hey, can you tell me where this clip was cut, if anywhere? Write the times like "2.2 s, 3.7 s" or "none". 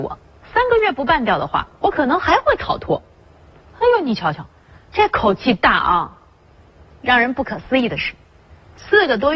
none